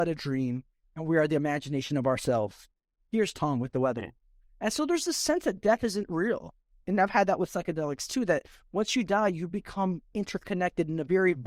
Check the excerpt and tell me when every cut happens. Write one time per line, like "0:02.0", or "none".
none